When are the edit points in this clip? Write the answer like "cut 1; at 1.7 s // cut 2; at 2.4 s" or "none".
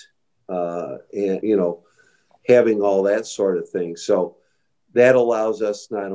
cut 1; at 1.4 s